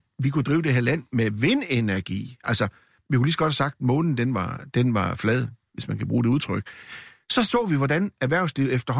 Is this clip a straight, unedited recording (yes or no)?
yes